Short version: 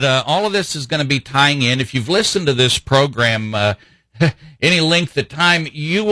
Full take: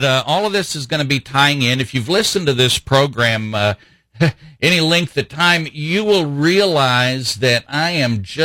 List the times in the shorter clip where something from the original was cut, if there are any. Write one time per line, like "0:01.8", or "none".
none